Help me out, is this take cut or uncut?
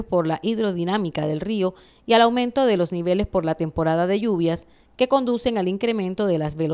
uncut